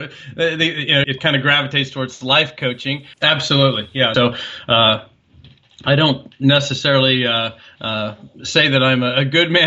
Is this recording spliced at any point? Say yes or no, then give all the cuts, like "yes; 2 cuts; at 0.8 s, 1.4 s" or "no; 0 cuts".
yes; 3 cuts; at 1.0 s, 3.1 s, 4.1 s